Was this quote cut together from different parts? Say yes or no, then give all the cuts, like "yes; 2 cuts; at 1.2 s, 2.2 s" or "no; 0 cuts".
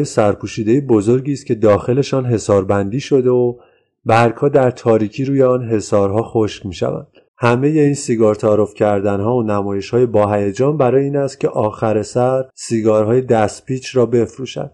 yes; 2 cuts; at 7.3 s, 12.5 s